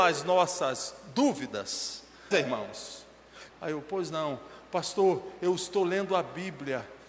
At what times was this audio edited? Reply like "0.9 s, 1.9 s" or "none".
2.3 s, 3.5 s